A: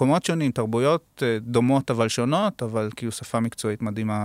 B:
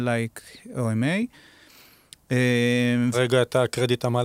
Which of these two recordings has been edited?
B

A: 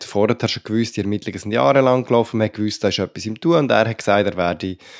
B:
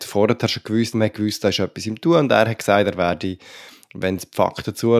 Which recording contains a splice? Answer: B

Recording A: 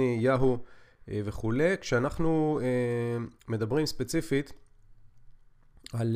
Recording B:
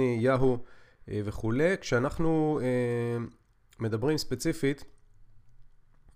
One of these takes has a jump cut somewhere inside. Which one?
A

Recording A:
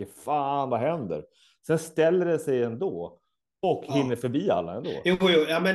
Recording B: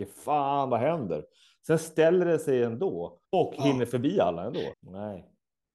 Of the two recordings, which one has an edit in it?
B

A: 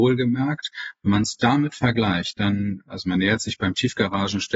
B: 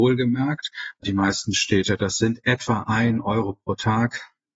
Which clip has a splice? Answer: B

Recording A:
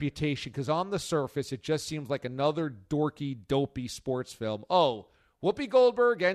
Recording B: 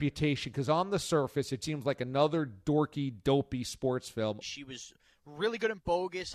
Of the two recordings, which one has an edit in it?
B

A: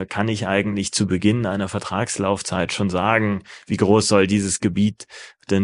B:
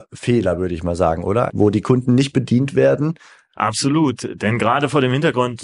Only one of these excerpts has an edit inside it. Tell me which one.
B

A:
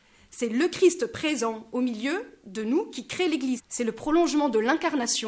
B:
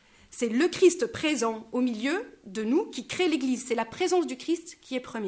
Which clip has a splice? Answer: A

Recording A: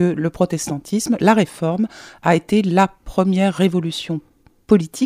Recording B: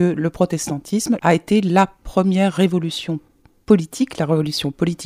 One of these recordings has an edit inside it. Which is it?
B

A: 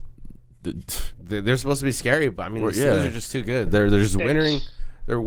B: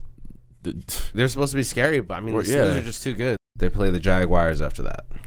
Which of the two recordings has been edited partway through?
B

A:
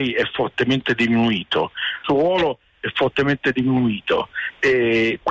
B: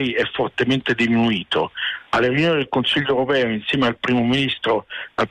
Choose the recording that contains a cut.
A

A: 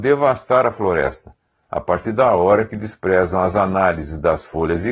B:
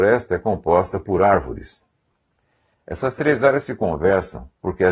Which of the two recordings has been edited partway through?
B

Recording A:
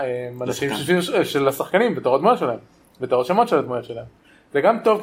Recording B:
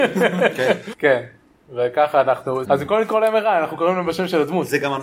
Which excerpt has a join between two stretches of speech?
B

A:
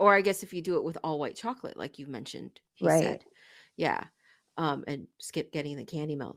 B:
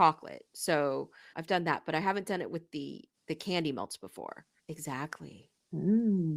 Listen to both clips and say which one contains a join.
B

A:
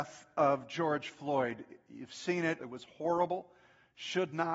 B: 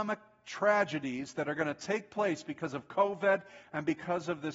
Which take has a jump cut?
A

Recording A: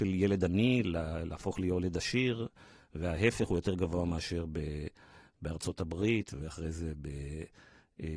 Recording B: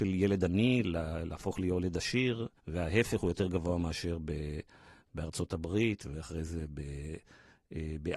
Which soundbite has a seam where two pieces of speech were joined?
B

